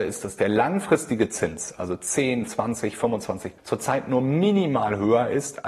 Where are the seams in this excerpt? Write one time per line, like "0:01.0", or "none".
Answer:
0:02.5
0:03.6